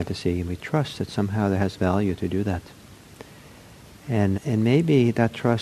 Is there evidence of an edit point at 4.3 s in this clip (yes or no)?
yes